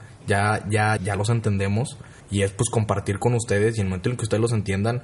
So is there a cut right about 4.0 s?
no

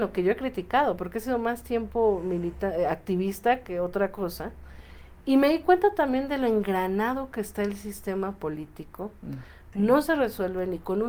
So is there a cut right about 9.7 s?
yes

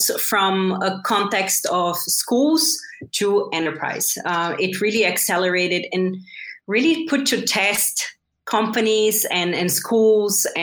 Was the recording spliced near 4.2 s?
no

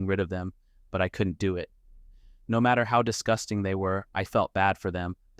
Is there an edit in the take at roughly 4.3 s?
yes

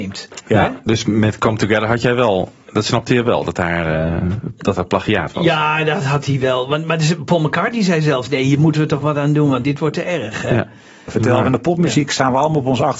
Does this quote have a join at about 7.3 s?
no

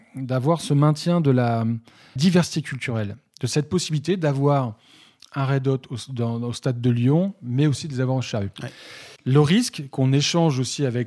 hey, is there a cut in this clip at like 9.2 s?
yes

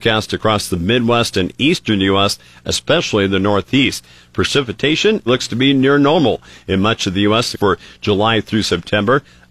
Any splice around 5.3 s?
yes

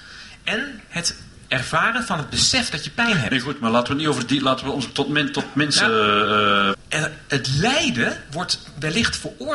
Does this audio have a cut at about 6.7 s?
yes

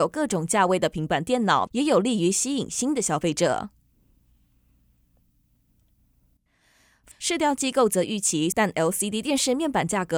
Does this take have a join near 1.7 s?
yes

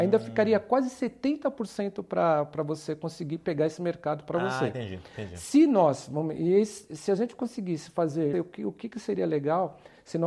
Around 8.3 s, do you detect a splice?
yes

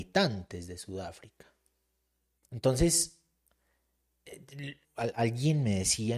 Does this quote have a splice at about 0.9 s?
no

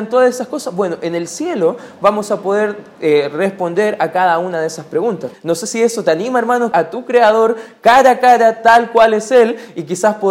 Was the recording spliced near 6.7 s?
yes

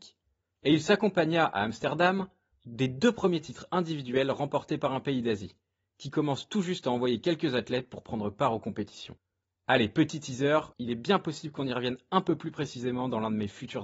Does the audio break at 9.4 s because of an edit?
yes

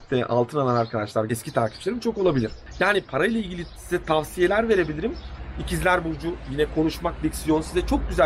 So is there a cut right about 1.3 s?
yes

